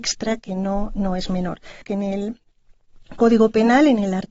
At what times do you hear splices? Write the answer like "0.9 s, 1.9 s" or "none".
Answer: 1.8 s